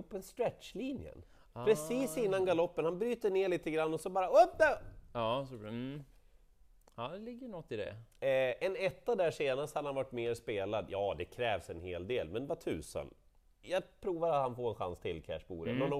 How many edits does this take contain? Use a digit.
0